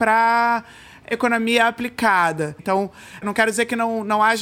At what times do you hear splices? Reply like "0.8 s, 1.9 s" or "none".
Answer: 2.6 s